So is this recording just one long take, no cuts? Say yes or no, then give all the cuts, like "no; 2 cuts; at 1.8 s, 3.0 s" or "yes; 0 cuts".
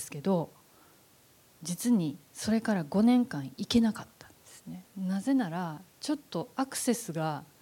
no; 1 cut; at 4.9 s